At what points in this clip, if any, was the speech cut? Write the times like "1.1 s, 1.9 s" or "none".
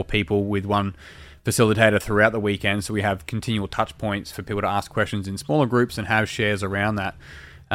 none